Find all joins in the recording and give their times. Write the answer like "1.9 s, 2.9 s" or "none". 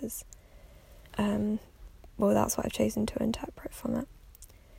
1.1 s